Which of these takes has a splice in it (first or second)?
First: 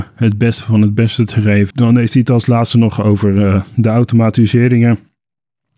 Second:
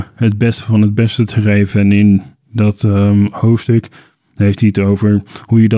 first